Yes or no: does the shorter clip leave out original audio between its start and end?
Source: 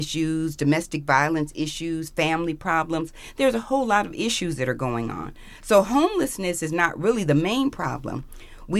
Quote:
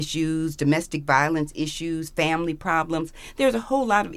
no